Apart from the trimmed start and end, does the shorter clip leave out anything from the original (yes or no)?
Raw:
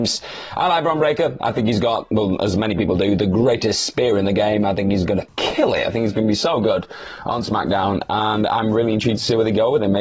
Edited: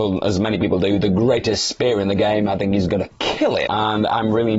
yes